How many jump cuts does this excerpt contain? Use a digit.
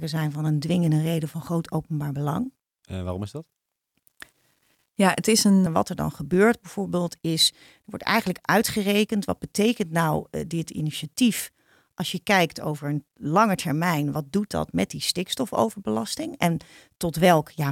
2